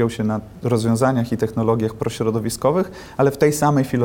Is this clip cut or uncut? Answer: uncut